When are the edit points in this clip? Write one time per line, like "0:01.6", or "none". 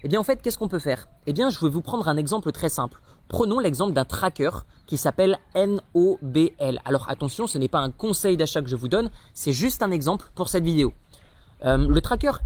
none